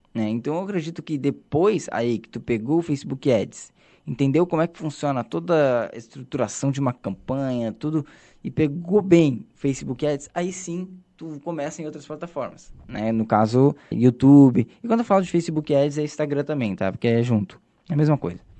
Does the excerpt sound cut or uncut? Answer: cut